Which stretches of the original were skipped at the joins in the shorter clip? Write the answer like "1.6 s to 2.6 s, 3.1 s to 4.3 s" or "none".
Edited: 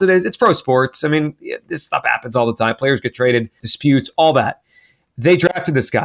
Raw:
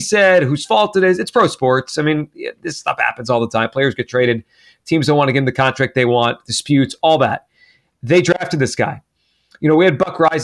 4.5 s to 6.4 s